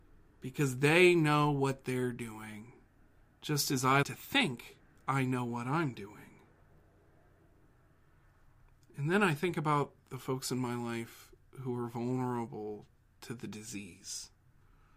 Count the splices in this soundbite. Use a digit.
1